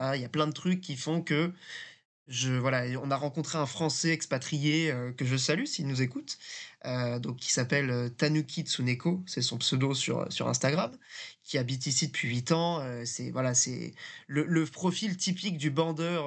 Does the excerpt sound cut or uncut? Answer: uncut